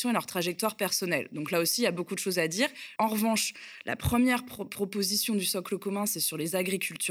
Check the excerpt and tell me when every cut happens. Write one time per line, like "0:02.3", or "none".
0:03.0